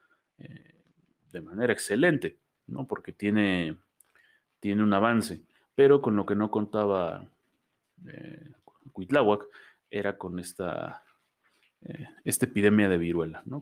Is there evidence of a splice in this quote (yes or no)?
no